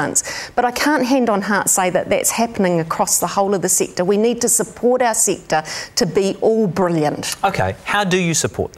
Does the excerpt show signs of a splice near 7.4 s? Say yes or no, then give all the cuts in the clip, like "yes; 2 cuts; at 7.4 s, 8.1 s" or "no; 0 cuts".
no; 0 cuts